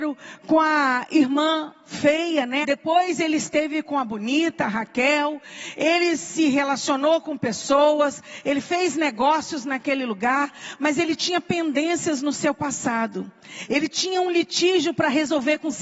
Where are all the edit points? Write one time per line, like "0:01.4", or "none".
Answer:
0:02.6